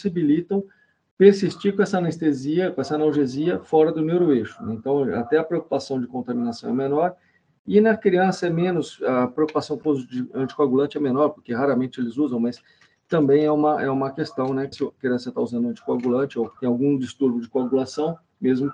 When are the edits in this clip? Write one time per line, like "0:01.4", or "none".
0:14.7
0:16.6